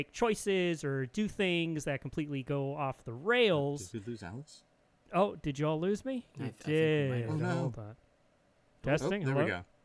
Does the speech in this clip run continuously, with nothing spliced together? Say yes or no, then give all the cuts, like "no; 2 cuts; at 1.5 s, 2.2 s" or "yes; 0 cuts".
no; 1 cut; at 8.7 s